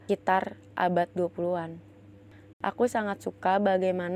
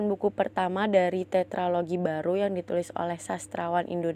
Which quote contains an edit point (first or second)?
first